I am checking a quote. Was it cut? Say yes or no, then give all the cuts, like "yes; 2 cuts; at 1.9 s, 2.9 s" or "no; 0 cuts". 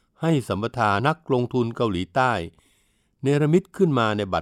yes; 1 cut; at 1.0 s